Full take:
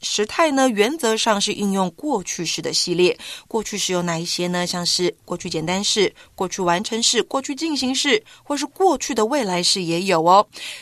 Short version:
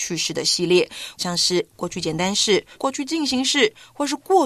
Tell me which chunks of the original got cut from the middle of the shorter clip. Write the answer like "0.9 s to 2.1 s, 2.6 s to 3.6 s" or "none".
3.5 s to 4.7 s, 6.2 s to 7.2 s